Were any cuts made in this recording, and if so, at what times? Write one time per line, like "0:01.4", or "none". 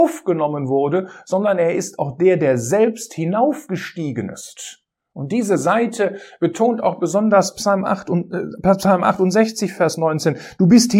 none